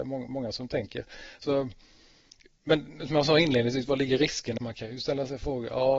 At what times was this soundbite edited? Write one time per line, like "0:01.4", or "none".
0:04.6